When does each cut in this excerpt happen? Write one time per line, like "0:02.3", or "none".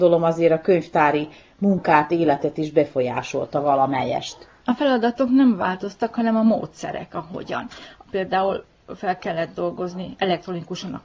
none